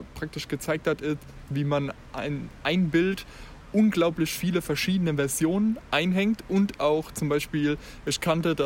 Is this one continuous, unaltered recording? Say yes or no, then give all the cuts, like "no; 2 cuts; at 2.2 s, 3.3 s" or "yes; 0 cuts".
no; 1 cut; at 1.5 s